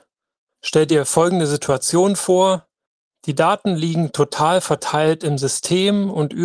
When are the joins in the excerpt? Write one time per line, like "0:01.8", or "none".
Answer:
none